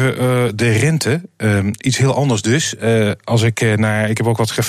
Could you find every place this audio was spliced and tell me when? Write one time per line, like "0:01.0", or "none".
none